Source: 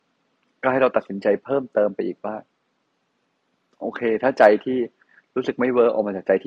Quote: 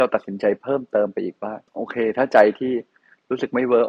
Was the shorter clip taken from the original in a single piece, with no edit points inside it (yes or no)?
no